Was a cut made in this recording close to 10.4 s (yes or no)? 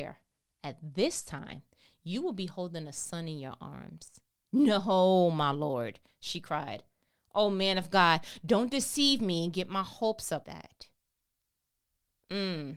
yes